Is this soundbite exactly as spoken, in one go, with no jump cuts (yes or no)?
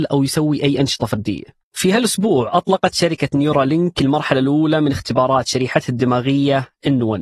no